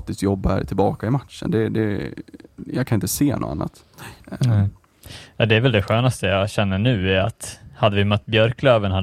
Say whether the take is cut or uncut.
uncut